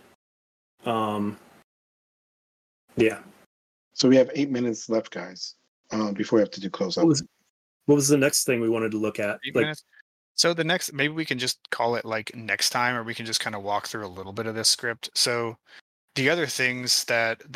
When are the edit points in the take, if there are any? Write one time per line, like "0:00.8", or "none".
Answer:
none